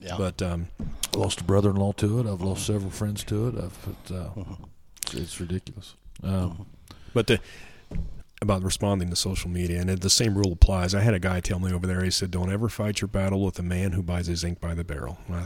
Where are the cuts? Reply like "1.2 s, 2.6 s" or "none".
8.2 s